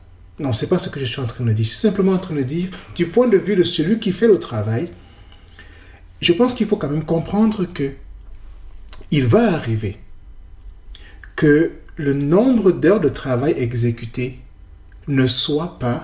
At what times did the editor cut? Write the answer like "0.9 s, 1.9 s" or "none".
none

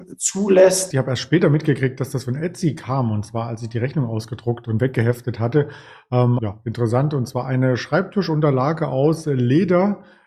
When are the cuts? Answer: 0.9 s, 6.4 s

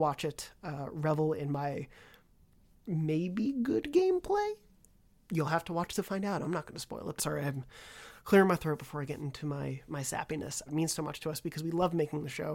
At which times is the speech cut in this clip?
7.2 s, 10.7 s

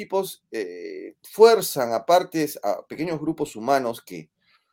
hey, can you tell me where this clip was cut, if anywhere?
1.2 s

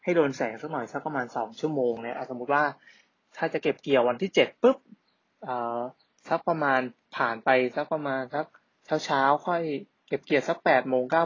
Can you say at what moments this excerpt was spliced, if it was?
none

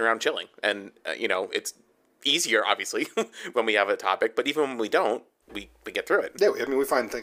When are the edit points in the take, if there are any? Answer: none

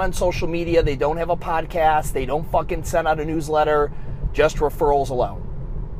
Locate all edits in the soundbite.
none

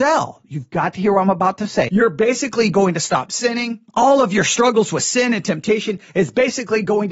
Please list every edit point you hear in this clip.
1.9 s, 3.9 s

